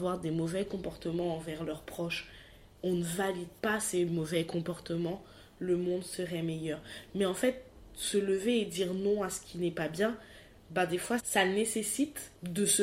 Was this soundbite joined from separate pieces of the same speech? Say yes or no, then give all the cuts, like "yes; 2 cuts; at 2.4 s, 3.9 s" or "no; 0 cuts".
yes; 1 cut; at 11.2 s